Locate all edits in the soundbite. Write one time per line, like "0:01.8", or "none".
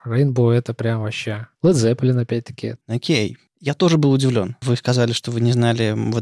0:02.8

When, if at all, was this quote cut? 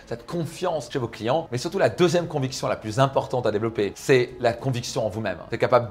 none

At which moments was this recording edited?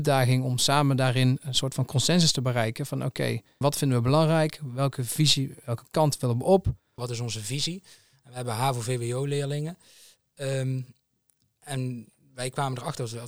0:03.6
0:07.0

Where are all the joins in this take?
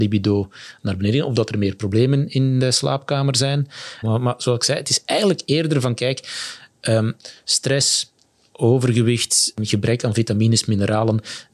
0:04.0

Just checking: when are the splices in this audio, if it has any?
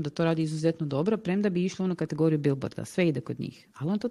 none

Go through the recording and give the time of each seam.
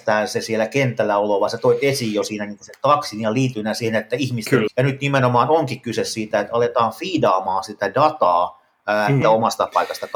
0:04.7
0:09.2

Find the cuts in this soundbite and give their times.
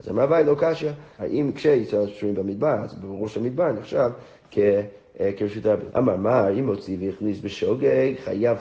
0:01.2
0:05.9

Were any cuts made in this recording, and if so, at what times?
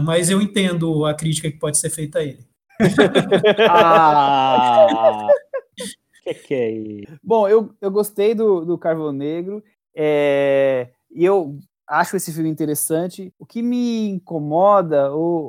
0:02.7

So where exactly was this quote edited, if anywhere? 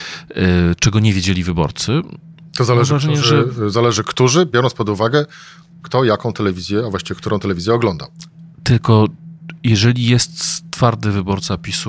none

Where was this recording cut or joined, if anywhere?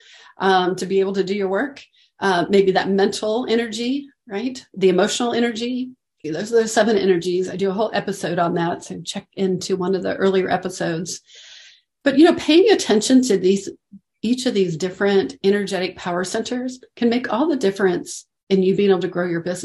0:06.2

